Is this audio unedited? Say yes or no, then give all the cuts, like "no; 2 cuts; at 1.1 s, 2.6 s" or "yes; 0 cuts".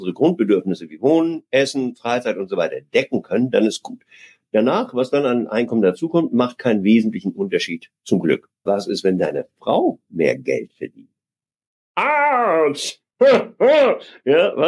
no; 1 cut; at 8.7 s